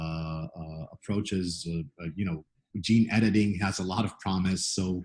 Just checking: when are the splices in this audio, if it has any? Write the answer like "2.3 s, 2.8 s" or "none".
none